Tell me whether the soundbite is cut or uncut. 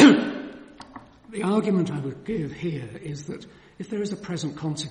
uncut